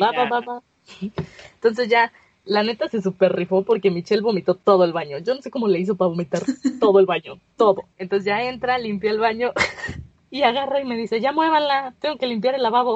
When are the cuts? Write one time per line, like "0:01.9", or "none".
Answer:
none